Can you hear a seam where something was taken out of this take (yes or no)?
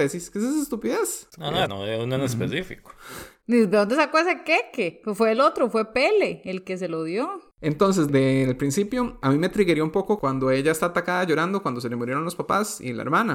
yes